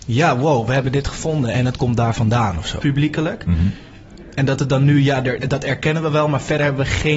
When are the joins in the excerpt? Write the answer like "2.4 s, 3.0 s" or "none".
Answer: 2.8 s, 5.4 s